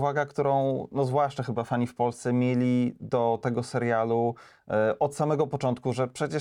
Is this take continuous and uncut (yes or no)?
yes